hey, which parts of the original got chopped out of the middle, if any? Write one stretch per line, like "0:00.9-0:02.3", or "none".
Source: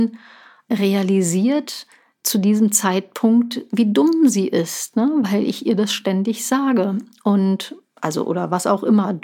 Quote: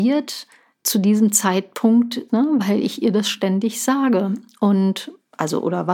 0:03.7-0:04.9